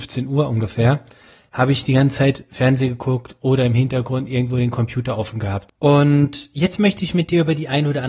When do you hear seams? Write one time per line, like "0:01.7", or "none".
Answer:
0:05.7